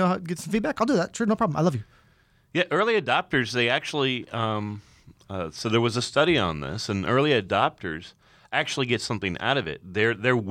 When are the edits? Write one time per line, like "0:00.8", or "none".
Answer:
none